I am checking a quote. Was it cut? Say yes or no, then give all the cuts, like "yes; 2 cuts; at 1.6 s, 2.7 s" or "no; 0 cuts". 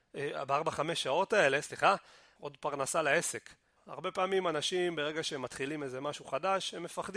yes; 2 cuts; at 2.4 s, 3.8 s